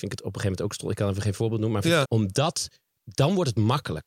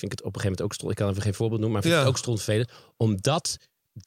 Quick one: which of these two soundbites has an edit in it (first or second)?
first